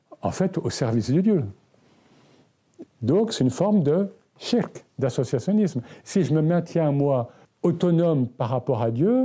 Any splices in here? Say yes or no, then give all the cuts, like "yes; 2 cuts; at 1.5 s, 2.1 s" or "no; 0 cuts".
yes; 2 cuts; at 2.9 s, 7.4 s